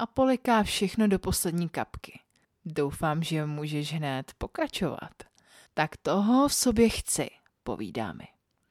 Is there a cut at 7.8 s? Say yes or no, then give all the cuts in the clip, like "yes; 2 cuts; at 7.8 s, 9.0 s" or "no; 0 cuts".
no; 2 cuts; at 2.4 s, 5.7 s